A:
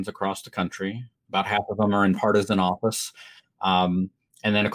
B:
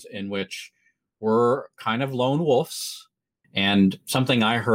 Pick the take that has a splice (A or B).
B